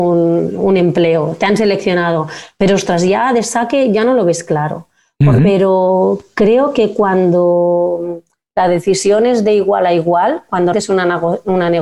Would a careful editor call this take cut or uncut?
cut